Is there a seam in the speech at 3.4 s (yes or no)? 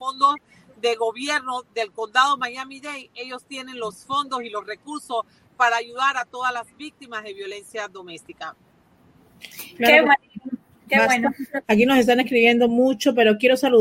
no